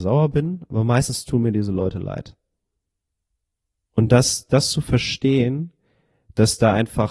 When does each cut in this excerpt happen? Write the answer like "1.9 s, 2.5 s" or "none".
none

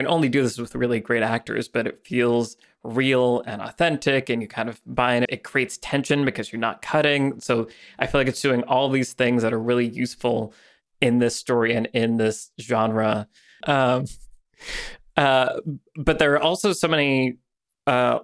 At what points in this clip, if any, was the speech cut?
5.3 s, 13.6 s

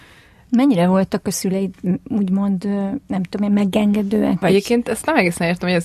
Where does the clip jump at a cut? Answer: none

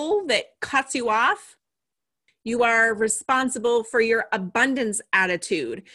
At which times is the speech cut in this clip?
2.3 s

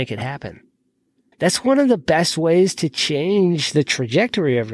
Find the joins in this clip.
1.3 s

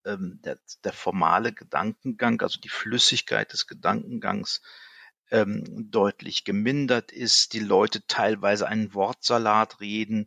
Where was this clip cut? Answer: none

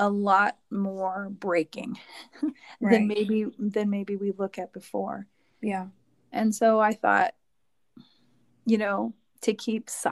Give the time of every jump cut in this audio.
none

